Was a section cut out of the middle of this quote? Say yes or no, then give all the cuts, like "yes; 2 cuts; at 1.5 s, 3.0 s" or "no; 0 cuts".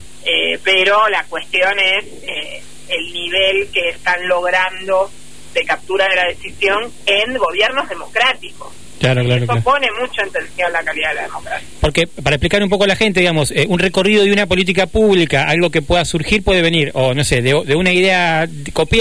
no; 0 cuts